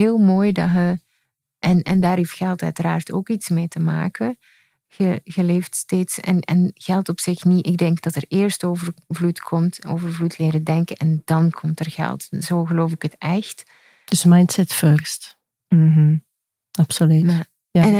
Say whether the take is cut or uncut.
uncut